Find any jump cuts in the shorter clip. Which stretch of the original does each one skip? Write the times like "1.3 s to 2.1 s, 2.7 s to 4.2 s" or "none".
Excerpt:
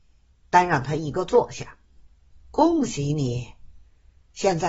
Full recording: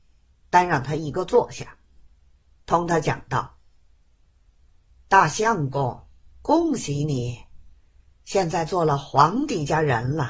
2.3 s to 6.2 s